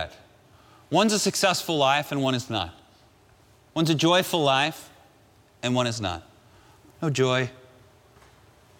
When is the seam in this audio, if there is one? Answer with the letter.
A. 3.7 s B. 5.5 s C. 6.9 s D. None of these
C